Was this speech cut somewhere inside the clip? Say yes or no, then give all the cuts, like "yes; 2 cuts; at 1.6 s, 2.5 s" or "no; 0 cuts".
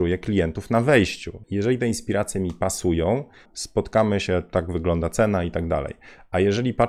yes; 2 cuts; at 1.4 s, 3.5 s